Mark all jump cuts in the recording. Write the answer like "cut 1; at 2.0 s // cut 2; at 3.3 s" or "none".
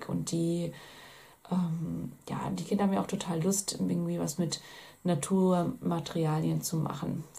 none